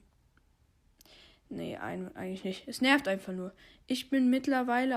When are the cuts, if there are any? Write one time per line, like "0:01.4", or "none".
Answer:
none